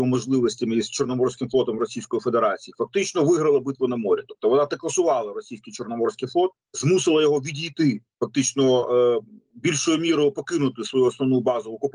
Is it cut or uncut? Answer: uncut